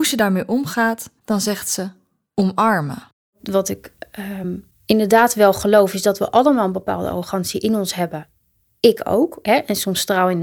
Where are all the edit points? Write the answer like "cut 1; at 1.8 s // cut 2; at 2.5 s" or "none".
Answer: none